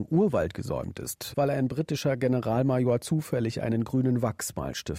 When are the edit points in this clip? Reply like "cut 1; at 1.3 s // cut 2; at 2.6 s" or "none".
cut 1; at 1.3 s

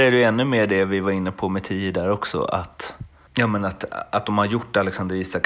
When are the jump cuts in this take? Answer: none

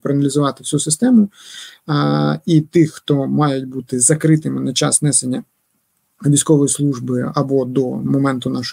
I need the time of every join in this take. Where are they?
none

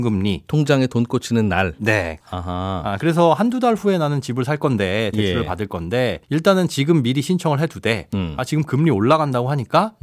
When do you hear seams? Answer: cut 1; at 2.2 s // cut 2; at 6.2 s

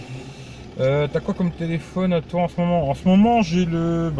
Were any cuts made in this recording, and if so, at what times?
none

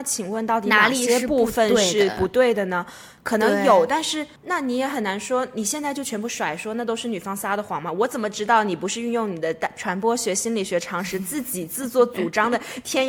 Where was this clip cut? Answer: cut 1; at 4.4 s

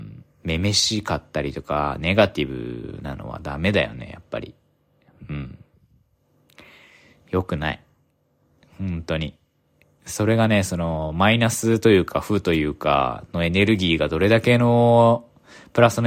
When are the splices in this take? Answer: none

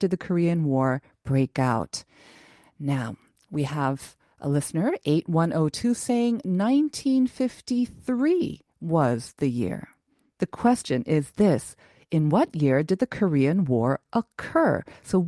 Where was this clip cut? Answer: cut 1; at 10.4 s

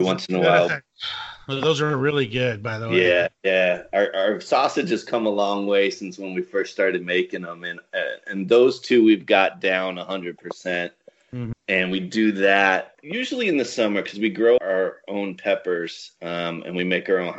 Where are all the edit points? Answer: cut 1; at 11.5 s // cut 2; at 14.6 s

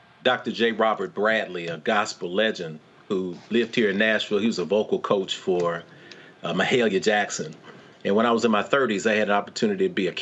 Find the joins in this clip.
none

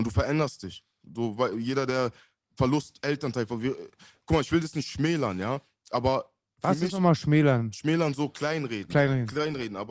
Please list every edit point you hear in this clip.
cut 1; at 1.0 s

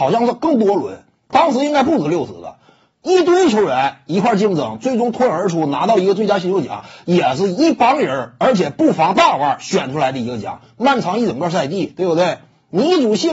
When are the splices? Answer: none

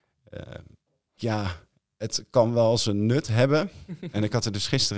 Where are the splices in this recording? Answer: cut 1; at 1.2 s

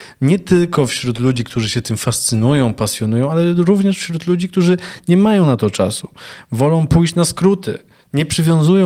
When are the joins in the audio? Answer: none

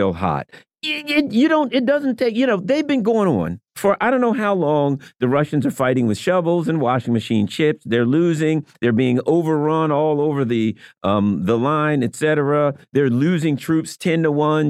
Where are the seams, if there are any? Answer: cut 1; at 3.7 s

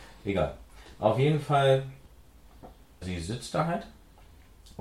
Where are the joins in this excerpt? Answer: cut 1; at 3.0 s

